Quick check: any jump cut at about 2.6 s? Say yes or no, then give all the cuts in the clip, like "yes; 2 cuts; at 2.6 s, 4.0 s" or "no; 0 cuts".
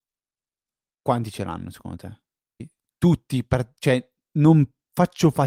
yes; 1 cut; at 2.6 s